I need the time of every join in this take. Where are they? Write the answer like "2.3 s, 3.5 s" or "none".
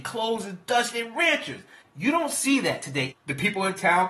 1.8 s, 3.1 s